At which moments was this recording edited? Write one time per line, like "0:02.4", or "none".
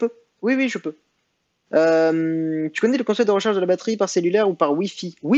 0:01.7